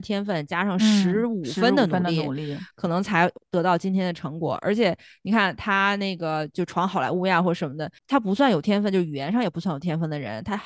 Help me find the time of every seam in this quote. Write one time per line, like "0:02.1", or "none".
none